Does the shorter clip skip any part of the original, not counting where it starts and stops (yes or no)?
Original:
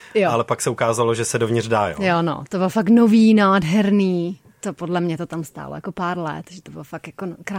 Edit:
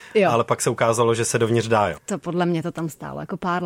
yes